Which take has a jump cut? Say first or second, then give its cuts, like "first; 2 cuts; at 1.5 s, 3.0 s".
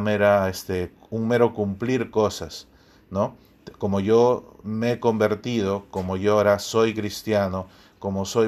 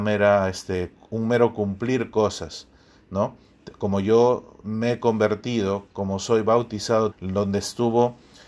second; 2 cuts; at 5.9 s, 7.1 s